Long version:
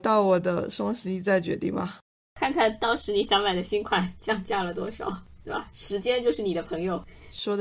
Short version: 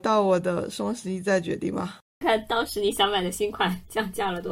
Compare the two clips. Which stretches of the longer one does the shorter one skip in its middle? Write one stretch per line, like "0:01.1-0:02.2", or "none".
0:02.2-0:02.5